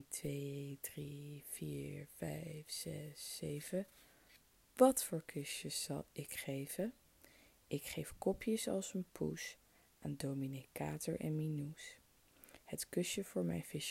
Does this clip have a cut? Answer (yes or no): no